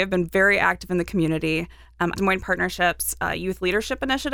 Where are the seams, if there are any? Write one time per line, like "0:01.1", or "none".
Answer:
0:02.1

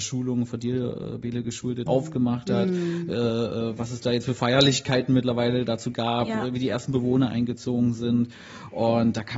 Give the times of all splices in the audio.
0:01.9

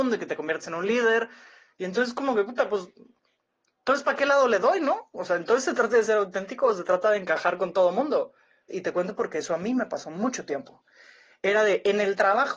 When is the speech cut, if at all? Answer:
0:08.7

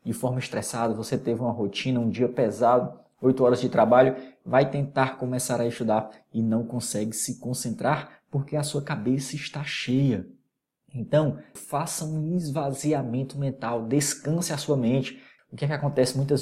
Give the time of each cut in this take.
0:11.6
0:15.4

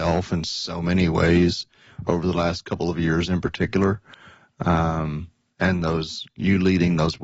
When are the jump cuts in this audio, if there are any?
none

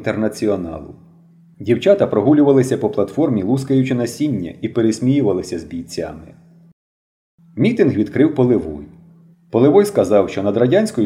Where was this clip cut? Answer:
0:01.5
0:09.3

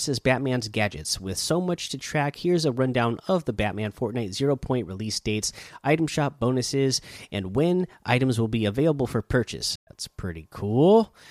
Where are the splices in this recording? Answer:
0:09.8

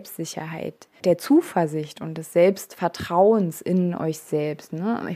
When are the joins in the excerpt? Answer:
0:01.0

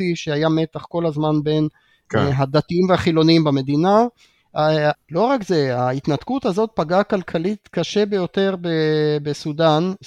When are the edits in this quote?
0:04.9

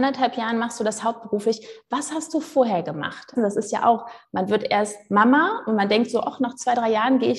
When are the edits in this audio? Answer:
0:03.4

